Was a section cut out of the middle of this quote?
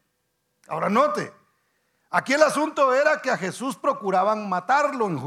no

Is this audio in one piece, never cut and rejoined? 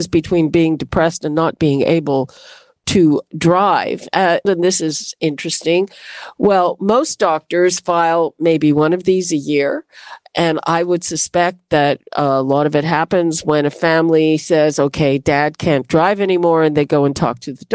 no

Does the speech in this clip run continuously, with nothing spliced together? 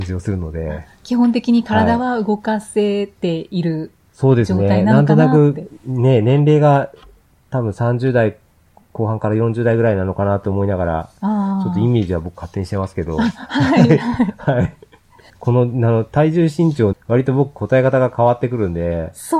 no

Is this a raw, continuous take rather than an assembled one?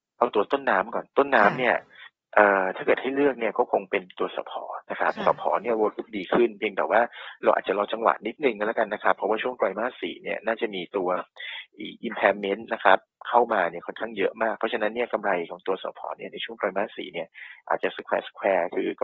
yes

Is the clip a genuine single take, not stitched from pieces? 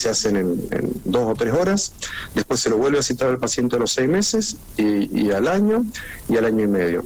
yes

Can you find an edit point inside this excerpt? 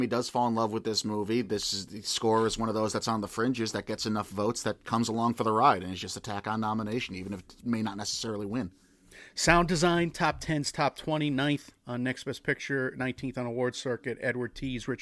no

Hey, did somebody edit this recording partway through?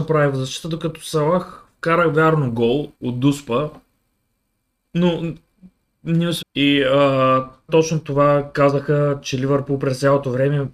yes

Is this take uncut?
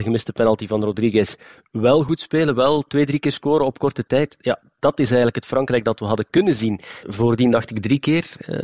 no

